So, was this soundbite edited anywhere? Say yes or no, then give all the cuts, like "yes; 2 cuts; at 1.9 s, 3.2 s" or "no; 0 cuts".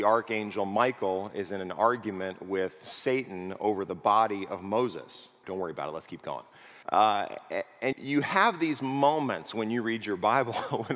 yes; 3 cuts; at 5.4 s, 6.8 s, 7.9 s